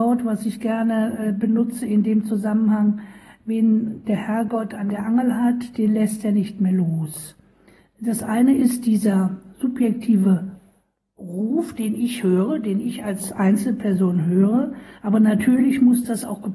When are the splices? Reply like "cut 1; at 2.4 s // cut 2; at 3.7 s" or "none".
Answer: cut 1; at 7.8 s